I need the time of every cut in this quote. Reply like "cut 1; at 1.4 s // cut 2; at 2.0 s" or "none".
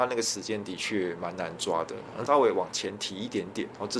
cut 1; at 2.3 s